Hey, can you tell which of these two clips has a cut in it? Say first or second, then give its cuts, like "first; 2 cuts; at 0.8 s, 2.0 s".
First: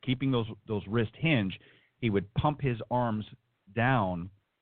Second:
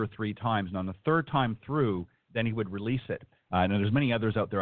second; 1 cut; at 3.4 s